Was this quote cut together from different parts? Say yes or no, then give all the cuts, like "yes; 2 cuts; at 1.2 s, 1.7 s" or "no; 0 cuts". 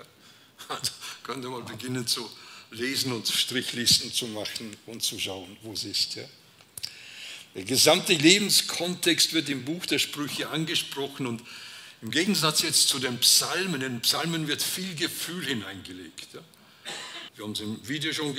yes; 1 cut; at 17.3 s